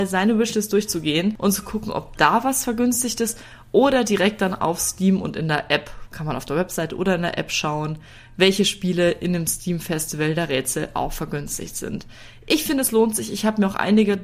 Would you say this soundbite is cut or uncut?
uncut